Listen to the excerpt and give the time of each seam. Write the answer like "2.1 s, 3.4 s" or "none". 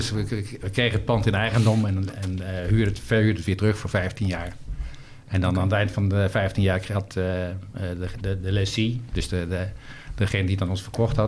none